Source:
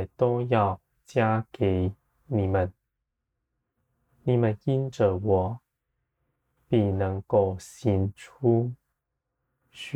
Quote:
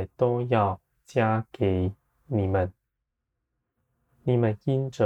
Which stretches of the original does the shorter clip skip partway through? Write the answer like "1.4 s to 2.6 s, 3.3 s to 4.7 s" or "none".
none